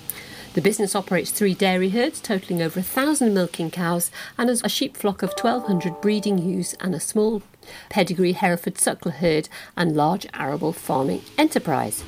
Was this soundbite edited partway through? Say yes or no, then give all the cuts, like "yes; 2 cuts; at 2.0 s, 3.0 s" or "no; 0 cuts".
yes; 2 cuts; at 4.6 s, 7.9 s